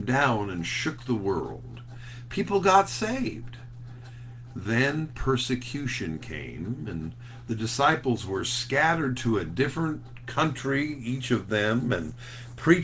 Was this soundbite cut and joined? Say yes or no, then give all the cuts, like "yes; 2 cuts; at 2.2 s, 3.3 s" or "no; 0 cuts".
no; 0 cuts